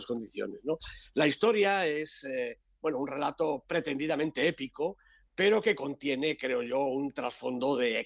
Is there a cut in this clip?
no; 0 cuts

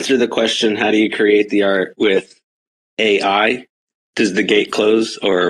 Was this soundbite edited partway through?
no; 0 cuts

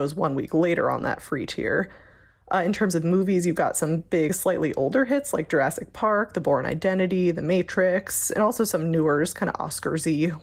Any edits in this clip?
no; 0 cuts

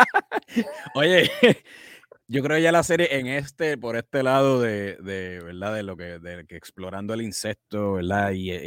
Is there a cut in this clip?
no; 0 cuts

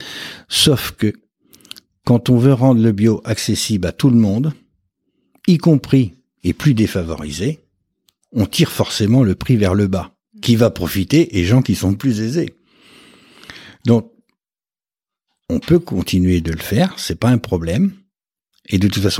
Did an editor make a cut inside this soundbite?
no; 0 cuts

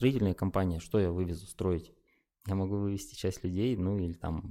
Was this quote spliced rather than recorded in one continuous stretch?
no; 0 cuts

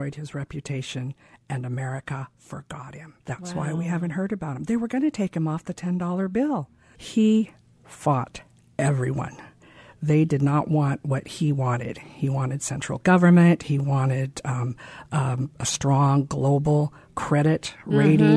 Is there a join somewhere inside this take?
yes; 2 cuts; at 3.2 s, 6.9 s

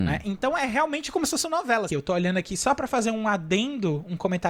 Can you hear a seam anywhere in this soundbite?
yes; 1 cut; at 1.9 s

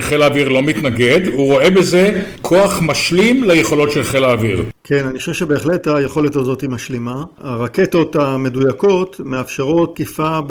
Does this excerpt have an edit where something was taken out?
no; 0 cuts

